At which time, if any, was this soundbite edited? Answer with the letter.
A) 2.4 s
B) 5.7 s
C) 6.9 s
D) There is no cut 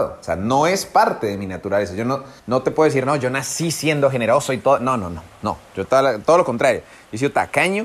A